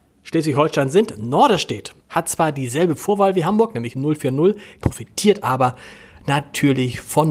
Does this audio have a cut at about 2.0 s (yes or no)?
yes